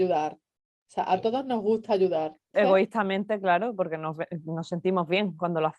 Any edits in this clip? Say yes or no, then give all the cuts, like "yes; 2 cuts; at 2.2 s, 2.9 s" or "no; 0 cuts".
yes; 1 cut; at 2.5 s